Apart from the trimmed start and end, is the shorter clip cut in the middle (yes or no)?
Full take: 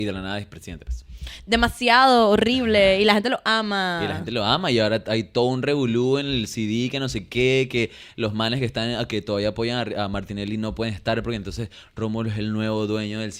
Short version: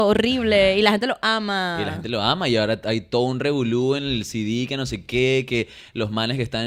no